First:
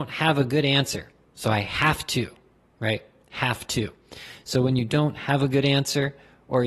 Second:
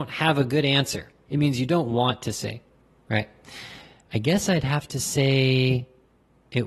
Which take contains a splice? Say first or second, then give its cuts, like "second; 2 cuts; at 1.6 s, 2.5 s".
second; 2 cuts; at 1.3 s, 4.0 s